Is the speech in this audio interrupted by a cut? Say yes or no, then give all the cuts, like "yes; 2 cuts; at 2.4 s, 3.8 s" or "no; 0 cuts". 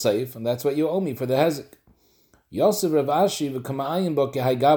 no; 0 cuts